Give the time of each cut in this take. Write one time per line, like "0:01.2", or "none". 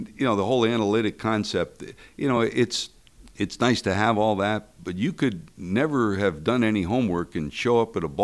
none